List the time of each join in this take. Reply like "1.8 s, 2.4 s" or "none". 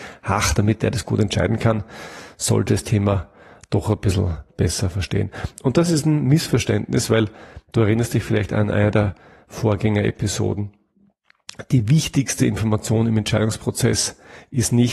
none